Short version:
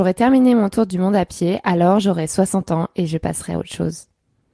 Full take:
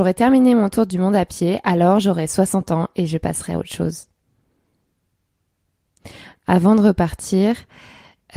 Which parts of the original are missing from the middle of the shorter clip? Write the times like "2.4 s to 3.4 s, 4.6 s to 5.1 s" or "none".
none